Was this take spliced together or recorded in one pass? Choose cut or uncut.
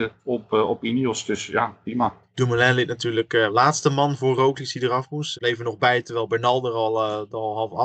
cut